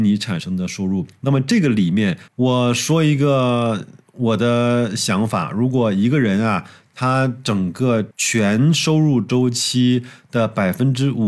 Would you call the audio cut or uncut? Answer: cut